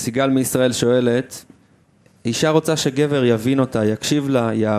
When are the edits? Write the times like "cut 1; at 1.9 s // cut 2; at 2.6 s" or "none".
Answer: none